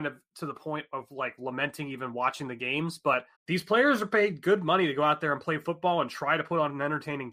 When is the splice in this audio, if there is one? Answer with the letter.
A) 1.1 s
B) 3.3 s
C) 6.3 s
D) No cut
B